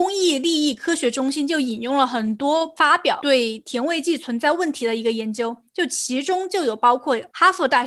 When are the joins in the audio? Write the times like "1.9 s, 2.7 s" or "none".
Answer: none